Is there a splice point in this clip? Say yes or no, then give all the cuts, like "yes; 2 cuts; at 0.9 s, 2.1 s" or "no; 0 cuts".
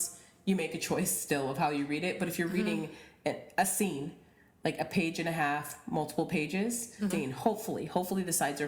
yes; 1 cut; at 7.1 s